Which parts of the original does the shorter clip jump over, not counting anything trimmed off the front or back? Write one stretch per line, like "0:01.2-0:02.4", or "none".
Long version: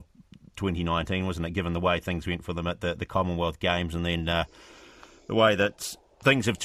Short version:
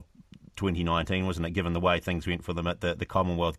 none